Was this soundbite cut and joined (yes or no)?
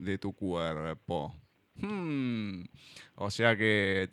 no